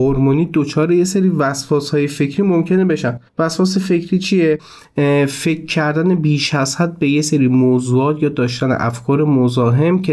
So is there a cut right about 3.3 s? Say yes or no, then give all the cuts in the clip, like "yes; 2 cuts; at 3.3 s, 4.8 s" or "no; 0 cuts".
yes; 1 cut; at 3.3 s